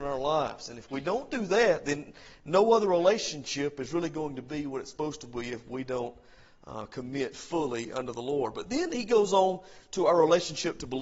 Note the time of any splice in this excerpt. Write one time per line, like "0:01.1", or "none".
none